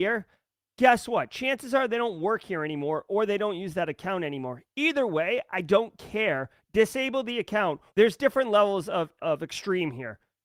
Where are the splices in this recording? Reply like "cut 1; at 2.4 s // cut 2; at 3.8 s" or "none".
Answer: cut 1; at 7.9 s // cut 2; at 9.2 s